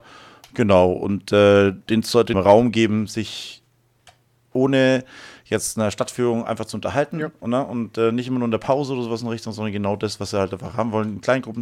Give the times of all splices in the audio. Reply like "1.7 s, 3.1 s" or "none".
2.3 s